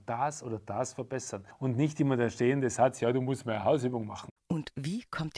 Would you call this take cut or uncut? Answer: cut